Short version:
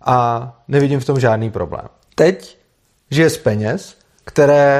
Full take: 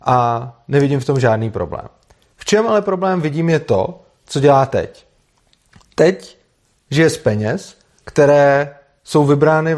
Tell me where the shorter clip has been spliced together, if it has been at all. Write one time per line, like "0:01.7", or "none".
0:02.1